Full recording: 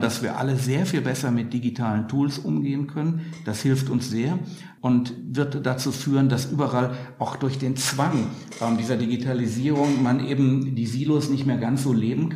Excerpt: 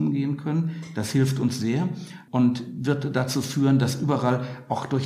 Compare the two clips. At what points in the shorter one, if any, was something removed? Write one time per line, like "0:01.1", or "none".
none